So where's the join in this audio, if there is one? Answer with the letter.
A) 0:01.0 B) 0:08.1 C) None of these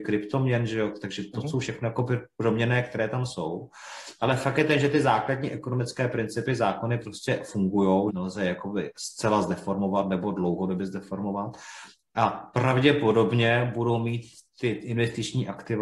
B